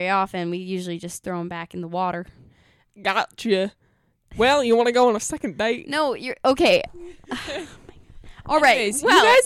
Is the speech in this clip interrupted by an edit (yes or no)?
no